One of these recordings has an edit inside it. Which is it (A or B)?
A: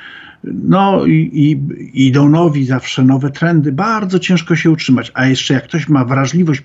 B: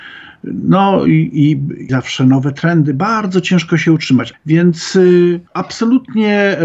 B